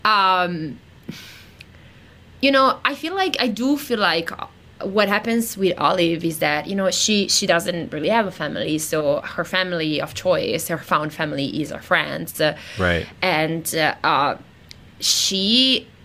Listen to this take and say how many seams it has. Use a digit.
1